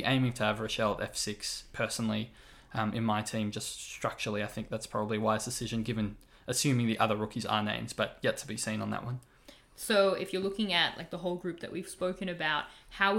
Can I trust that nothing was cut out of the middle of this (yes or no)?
yes